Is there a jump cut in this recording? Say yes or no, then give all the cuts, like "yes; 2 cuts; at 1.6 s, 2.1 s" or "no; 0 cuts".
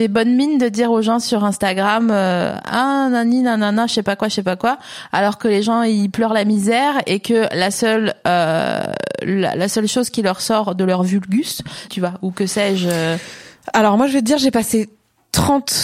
yes; 1 cut; at 11.9 s